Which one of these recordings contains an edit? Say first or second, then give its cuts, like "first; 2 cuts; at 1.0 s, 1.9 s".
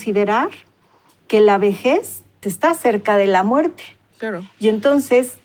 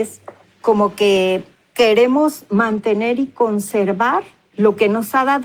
first; 2 cuts; at 2.4 s, 4.1 s